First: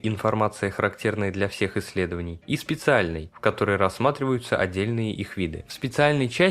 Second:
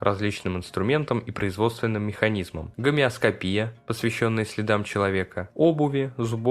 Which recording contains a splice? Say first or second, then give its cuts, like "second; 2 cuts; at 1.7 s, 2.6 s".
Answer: second; 1 cut; at 2.7 s